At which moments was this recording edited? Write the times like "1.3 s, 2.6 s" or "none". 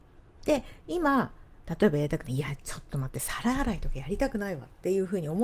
none